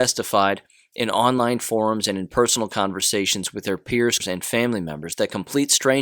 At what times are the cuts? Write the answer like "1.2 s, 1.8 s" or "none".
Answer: 4.2 s